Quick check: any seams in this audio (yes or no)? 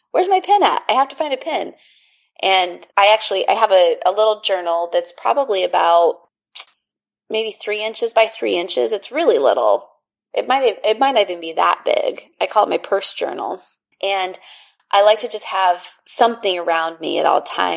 no